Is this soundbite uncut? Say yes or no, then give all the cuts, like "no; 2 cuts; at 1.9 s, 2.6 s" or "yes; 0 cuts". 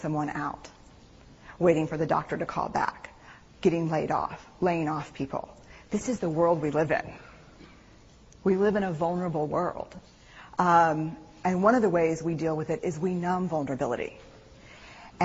yes; 0 cuts